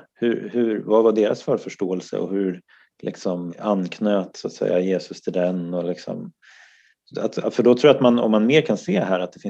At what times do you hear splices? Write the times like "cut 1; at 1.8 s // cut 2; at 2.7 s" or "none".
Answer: cut 1; at 3.5 s